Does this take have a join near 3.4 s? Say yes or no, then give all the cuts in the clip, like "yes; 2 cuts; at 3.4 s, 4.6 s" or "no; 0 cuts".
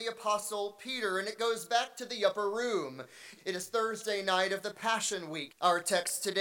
yes; 2 cuts; at 3.4 s, 5.5 s